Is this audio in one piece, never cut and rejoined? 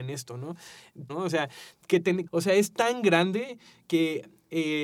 no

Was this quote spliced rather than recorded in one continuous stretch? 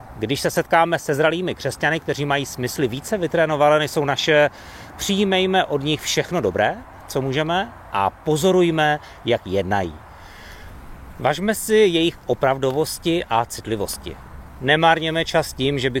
no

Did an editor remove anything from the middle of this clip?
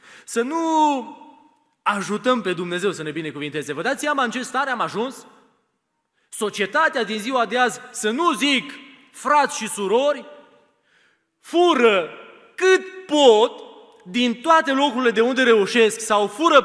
no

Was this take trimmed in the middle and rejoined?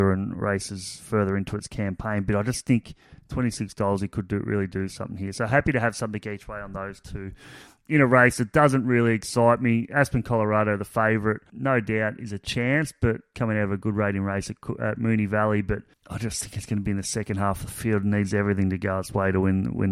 no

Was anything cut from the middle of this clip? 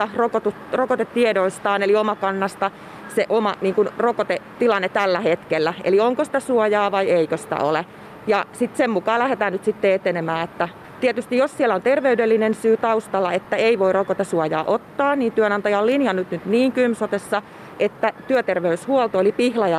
no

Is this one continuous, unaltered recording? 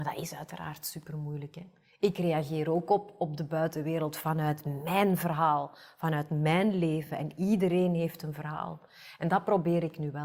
yes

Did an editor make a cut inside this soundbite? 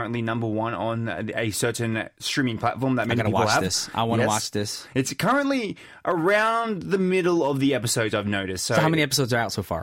no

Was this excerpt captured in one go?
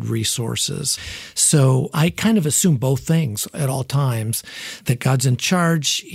yes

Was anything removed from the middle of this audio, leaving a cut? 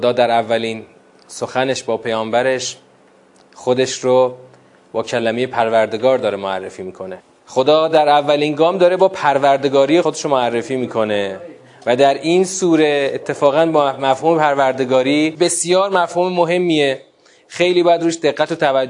yes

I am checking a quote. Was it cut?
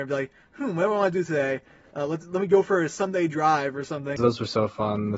yes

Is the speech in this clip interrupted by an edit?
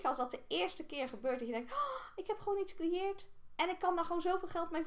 no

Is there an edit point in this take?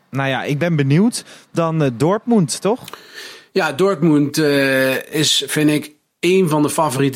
yes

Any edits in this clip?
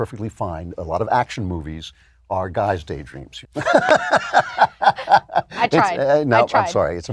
yes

